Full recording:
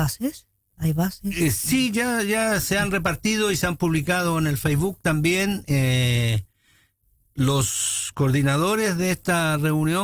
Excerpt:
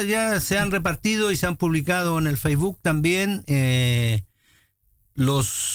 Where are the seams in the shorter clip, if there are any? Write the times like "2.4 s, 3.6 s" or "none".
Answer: none